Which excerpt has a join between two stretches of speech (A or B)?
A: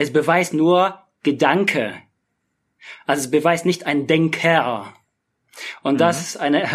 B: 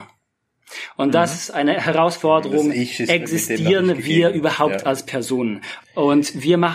B